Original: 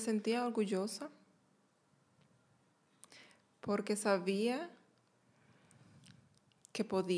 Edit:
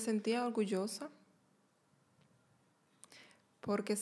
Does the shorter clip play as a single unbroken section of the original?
yes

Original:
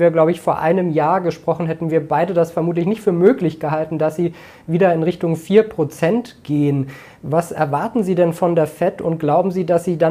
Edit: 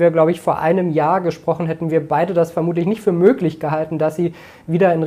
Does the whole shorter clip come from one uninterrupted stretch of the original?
yes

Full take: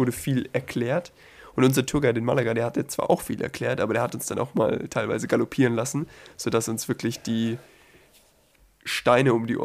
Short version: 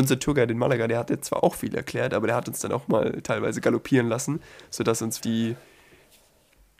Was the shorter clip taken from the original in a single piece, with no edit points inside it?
no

